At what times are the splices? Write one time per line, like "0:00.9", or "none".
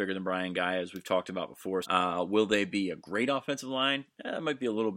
0:01.8